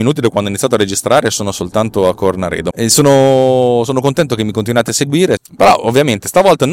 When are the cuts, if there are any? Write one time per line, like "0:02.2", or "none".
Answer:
0:02.7
0:05.4